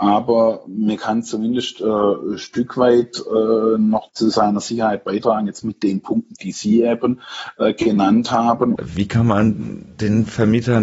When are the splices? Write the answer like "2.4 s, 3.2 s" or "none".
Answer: 8.8 s